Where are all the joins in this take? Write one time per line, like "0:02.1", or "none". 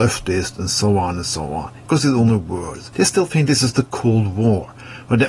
0:01.9
0:02.9